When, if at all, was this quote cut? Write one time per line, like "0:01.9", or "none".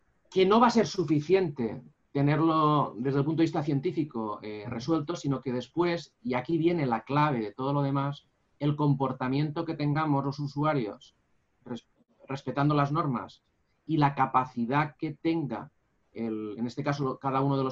none